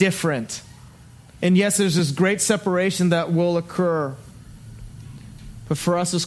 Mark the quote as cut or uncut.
cut